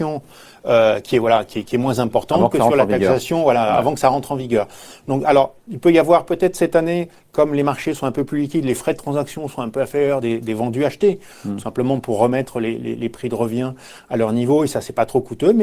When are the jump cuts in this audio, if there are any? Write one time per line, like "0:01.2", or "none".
none

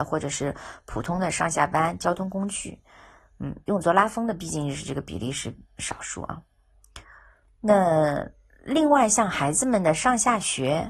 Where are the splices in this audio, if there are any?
none

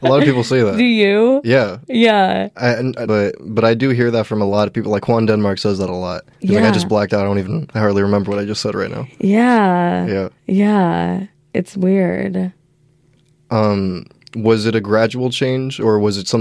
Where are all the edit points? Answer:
0:03.1
0:06.3

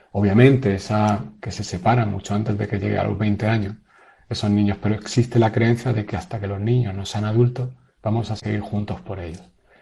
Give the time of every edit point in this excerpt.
0:01.4

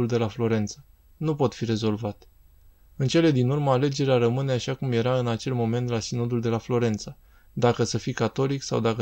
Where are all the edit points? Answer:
none

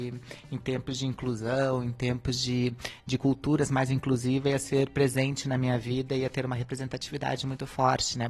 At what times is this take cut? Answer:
none

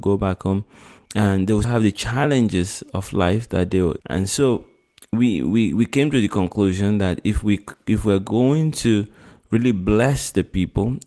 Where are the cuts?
0:01.6
0:04.0

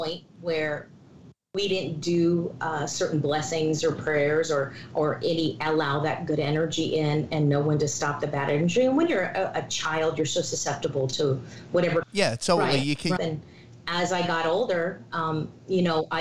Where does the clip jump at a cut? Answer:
0:12.0
0:13.2

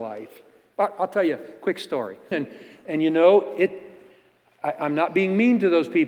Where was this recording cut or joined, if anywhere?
0:02.3

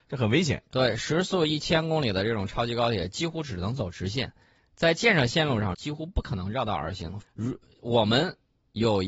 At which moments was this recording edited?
0:05.7
0:07.2

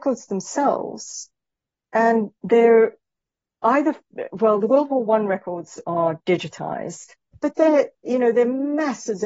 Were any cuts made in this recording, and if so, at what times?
0:07.3

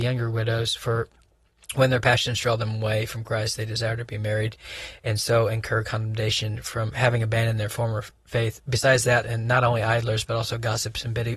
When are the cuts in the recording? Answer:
0:09.2

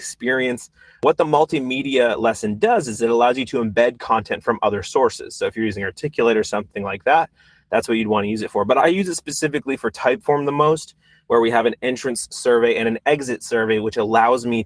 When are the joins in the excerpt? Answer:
none

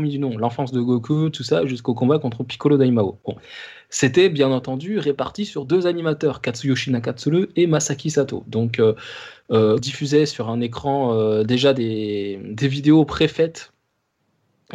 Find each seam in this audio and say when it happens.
0:09.8

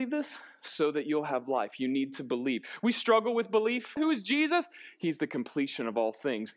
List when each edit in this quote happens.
0:04.0

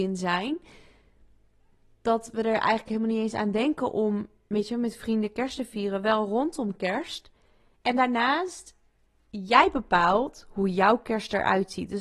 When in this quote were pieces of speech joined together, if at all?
0:07.8

